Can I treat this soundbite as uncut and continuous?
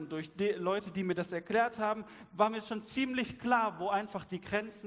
yes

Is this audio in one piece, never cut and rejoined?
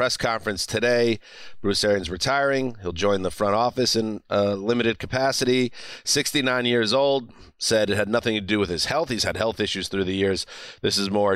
yes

